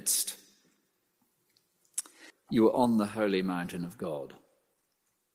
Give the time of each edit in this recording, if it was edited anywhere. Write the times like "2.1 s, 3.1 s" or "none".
2.3 s